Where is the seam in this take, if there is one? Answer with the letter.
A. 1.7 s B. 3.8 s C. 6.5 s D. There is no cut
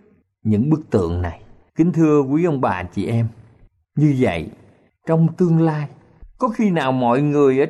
A